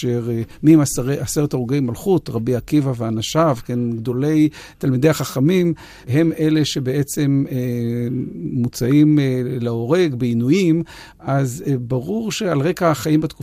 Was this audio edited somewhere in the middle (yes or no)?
no